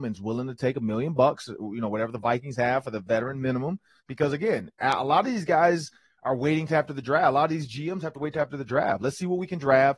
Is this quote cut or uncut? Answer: cut